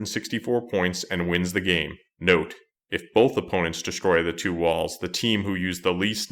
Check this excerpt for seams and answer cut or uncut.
uncut